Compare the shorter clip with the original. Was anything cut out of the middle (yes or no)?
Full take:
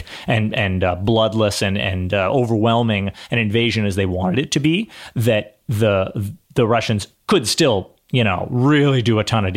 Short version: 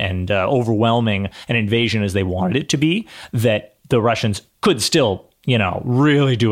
yes